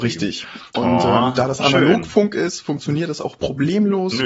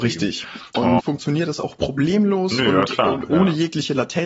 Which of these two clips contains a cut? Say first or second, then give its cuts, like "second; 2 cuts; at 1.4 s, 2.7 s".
second; 1 cut; at 1.0 s